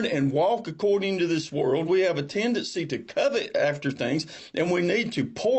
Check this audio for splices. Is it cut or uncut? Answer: cut